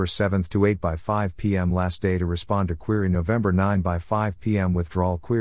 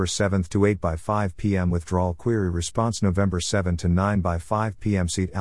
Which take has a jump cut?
second; 1 cut; at 1.7 s

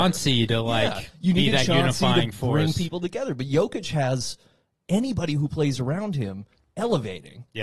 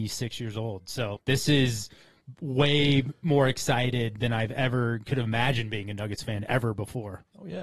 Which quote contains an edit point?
second; 1 cut; at 1.2 s

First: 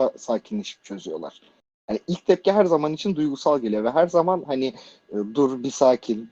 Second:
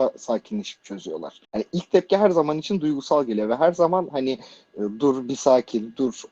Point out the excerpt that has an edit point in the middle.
second; 1 cut; at 1.4 s

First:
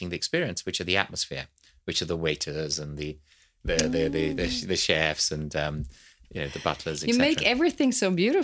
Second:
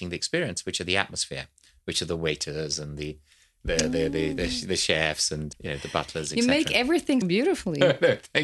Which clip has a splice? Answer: second; 2 cuts; at 5.5 s, 7.2 s

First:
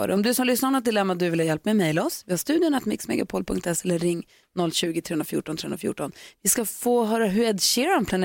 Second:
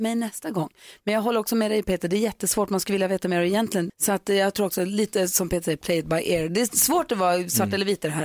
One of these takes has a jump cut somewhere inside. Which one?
second; 1 cut; at 3.9 s

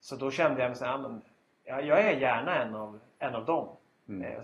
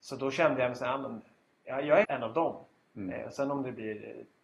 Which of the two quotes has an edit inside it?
second; 1 cut; at 2.0 s

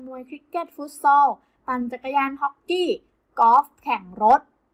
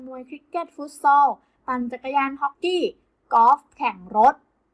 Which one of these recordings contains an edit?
second; 1 cut; at 2.5 s

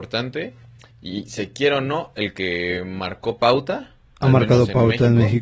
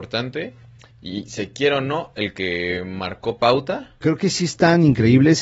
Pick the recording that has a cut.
second; 1 cut; at 4.0 s

